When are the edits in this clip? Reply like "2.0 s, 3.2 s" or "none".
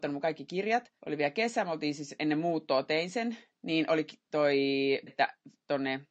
1.0 s, 5.1 s